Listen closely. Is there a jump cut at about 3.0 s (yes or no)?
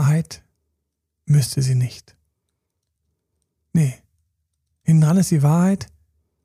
no